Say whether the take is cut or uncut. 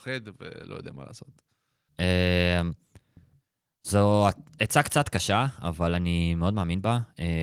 cut